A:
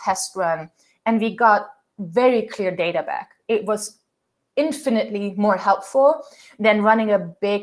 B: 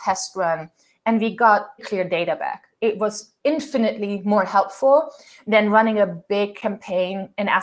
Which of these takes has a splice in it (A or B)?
B